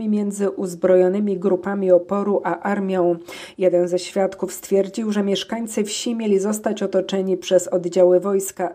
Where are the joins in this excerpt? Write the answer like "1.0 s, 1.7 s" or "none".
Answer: none

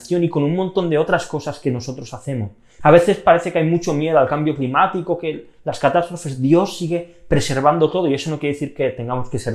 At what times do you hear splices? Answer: 2.8 s

